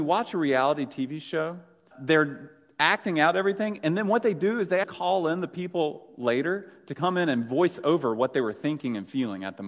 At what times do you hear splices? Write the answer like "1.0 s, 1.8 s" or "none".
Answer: 1.9 s, 4.8 s